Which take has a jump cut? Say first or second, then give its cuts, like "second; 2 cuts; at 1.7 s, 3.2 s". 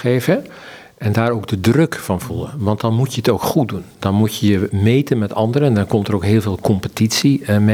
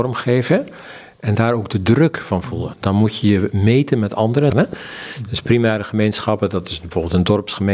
second; 2 cuts; at 2.7 s, 4.5 s